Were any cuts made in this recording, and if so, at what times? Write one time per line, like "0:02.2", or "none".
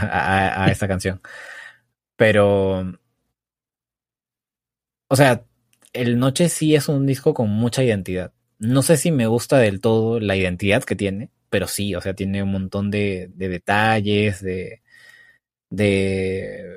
0:12.2
0:13.3